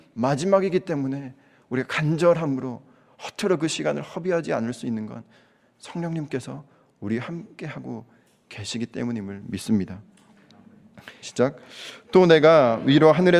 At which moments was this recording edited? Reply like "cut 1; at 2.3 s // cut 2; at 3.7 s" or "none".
cut 1; at 11.2 s